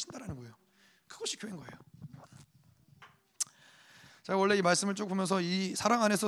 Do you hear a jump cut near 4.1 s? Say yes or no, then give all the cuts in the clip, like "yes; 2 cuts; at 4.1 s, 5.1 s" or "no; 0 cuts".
yes; 1 cut; at 4.1 s